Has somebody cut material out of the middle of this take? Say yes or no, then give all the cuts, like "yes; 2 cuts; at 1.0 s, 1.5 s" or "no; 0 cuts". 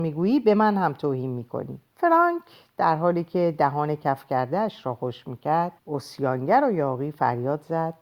yes; 2 cuts; at 1.9 s, 5.8 s